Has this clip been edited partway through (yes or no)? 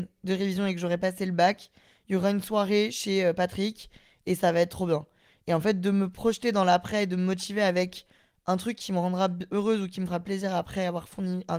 no